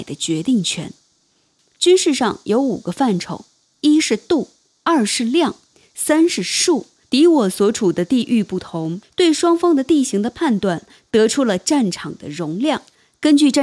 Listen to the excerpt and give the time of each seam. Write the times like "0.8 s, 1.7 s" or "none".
7.0 s, 9.0 s